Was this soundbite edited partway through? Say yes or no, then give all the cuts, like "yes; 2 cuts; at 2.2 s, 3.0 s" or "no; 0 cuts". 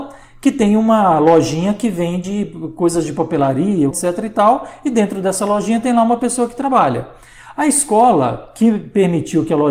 yes; 1 cut; at 3.9 s